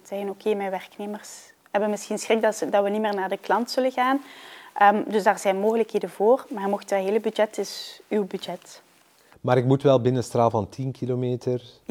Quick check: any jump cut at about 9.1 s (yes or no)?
no